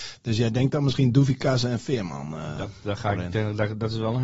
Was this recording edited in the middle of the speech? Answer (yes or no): no